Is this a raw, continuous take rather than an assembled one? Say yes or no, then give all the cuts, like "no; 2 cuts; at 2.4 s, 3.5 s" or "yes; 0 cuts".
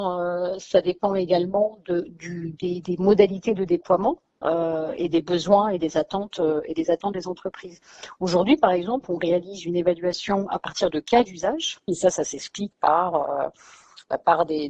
no; 1 cut; at 11.9 s